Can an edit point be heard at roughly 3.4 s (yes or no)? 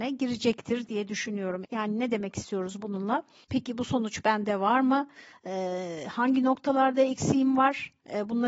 yes